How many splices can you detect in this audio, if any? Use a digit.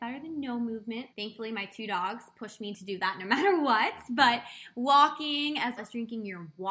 2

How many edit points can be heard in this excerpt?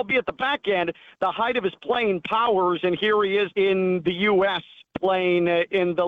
1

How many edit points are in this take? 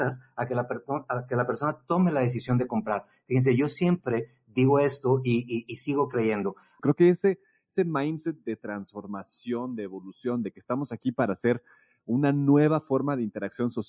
1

